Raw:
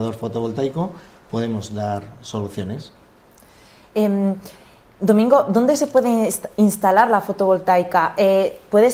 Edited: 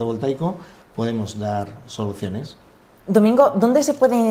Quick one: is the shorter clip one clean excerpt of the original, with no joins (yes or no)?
no